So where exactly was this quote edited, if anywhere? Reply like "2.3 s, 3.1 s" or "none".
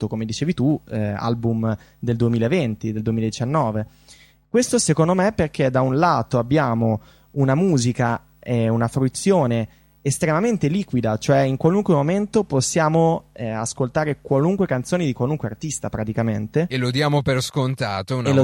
none

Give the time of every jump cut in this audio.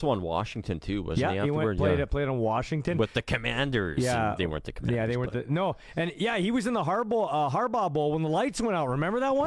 none

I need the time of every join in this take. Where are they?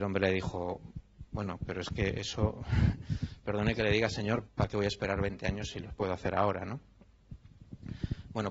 1.3 s, 4.5 s

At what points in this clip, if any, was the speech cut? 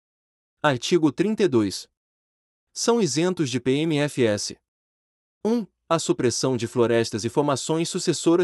none

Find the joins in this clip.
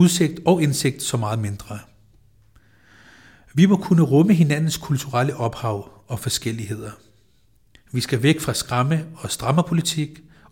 none

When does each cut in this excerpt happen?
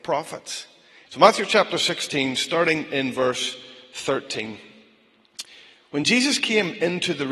1.1 s

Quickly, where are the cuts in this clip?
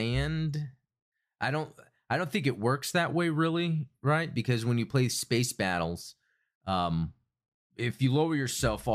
none

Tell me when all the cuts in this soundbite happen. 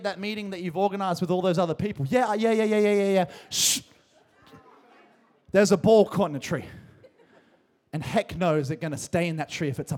none

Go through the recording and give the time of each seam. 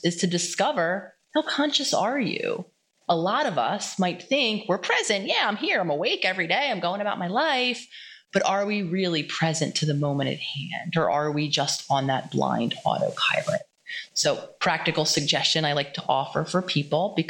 none

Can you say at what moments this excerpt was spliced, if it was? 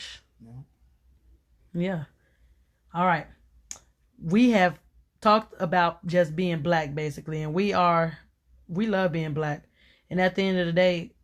1.6 s

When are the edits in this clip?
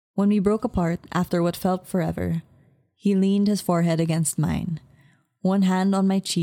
1.8 s

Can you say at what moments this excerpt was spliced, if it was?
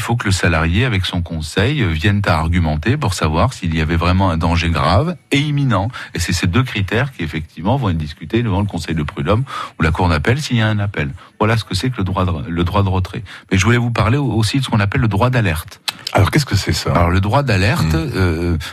none

